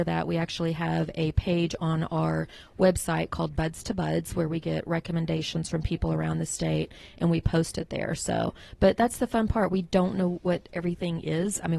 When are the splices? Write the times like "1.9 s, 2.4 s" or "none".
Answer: none